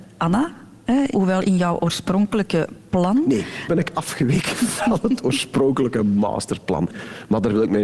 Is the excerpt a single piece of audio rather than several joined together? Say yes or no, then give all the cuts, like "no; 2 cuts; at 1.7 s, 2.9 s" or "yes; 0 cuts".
no; 2 cuts; at 1.1 s, 3.7 s